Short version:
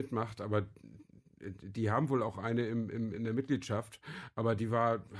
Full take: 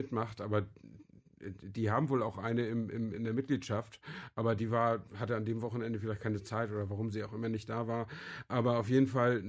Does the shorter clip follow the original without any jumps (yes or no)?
yes